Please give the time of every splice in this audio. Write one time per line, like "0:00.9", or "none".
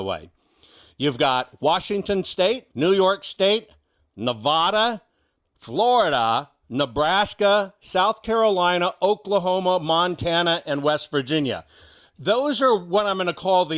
0:02.7
0:05.4

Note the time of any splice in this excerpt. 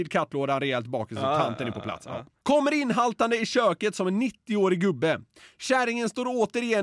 none

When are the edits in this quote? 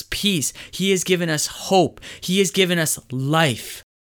none

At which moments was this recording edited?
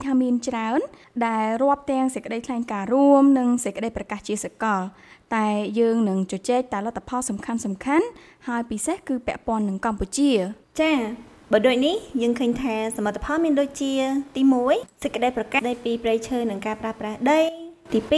0:15.6

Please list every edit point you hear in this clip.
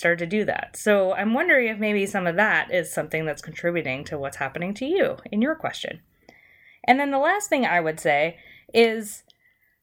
none

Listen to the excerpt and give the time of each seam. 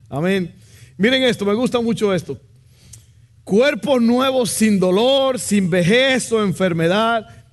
none

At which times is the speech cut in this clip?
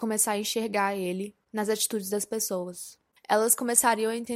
0:03.2

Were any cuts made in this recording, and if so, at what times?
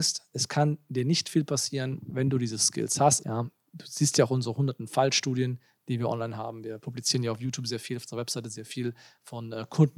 0:03.2

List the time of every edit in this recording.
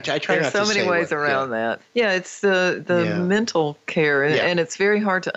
0:01.8

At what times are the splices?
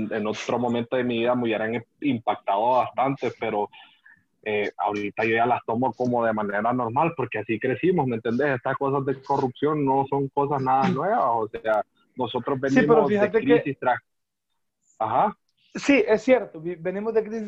none

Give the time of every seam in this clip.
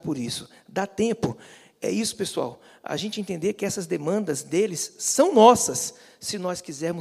none

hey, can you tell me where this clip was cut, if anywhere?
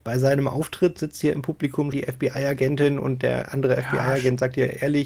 0:01.9

